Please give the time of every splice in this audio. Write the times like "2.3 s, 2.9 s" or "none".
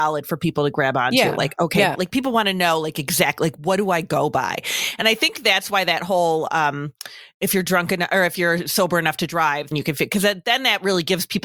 1.9 s, 9.7 s